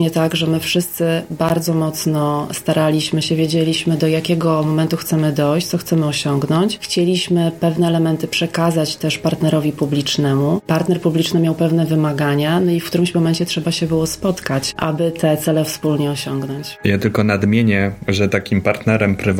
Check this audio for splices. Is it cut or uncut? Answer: cut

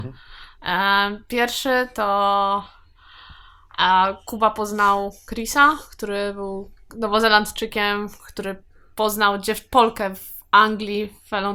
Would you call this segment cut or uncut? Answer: uncut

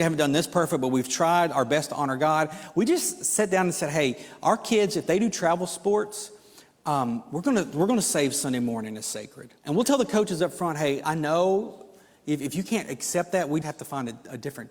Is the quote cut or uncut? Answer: cut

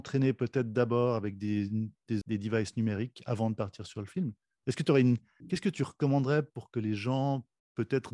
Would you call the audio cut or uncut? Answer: cut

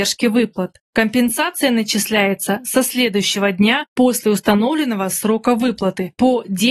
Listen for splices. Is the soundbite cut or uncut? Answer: uncut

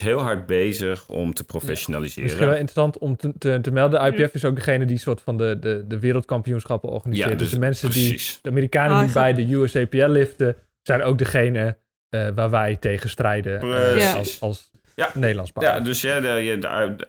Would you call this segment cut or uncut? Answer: uncut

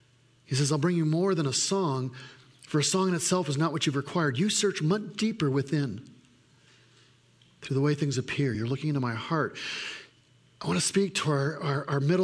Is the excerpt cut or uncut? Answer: uncut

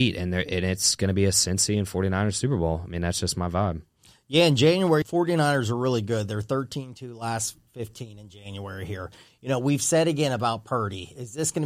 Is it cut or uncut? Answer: cut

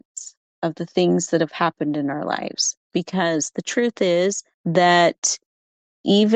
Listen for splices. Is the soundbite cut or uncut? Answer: cut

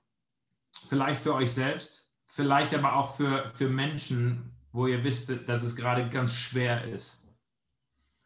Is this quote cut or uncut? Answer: cut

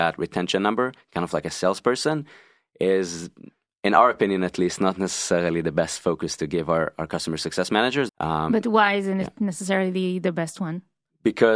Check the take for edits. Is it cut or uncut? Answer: cut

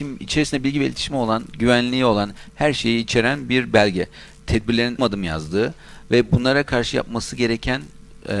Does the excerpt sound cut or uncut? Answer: cut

